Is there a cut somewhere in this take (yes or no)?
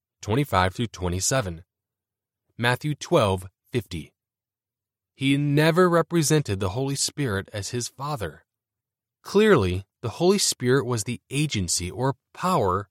no